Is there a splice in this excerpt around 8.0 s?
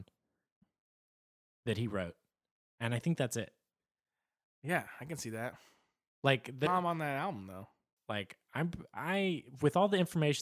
yes; 2 cuts; at 6.7 s, 8.0 s

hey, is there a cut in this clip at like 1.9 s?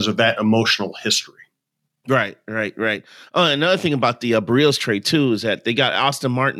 no; 0 cuts

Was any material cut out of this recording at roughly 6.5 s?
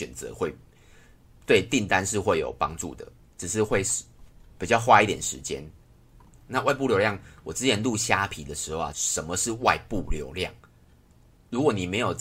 yes; 2 cuts; at 6.5 s, 8.9 s

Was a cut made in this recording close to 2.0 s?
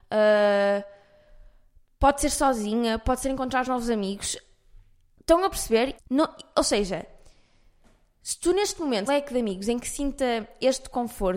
no; 2 cuts; at 6.0 s, 9.1 s

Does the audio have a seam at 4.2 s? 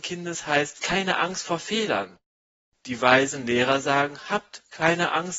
no; 0 cuts

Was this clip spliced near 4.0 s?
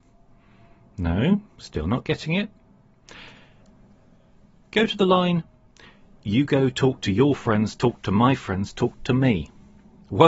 no; 0 cuts

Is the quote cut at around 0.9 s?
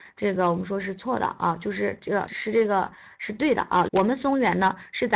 no; 2 cuts; at 2.3 s, 3.9 s

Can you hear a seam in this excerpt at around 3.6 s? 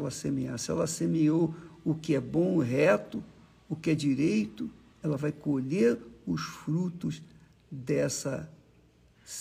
no; 1 cut; at 5.0 s

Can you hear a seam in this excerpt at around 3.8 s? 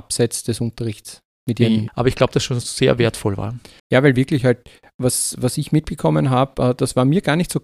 yes; 2 cuts; at 1.9 s, 3.8 s

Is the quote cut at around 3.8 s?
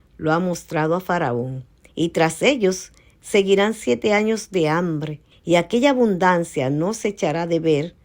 no; 2 cuts; at 1.9 s, 5.3 s

